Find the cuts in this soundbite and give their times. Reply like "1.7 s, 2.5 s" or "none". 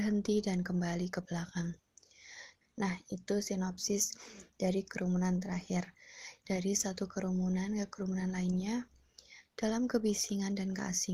2.6 s, 6.4 s

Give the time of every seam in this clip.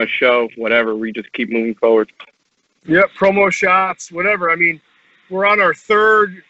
none

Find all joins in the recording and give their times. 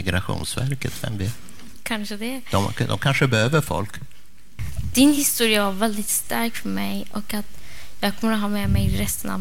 1.8 s

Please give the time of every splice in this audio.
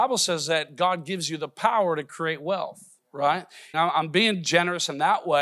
3.7 s

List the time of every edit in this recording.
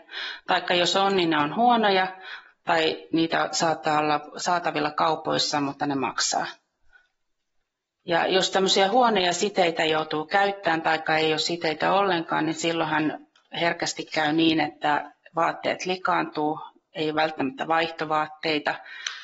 none

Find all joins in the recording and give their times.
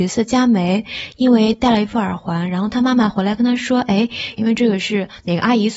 4.3 s

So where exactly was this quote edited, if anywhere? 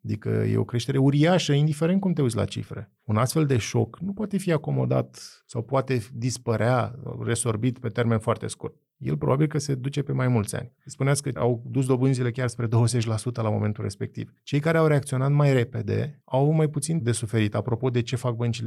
10.8 s

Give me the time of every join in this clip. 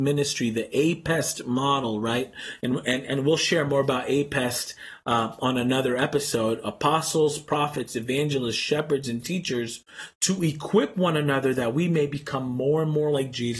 none

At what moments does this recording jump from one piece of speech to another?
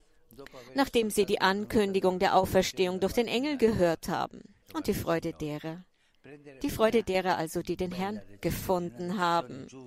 4.6 s

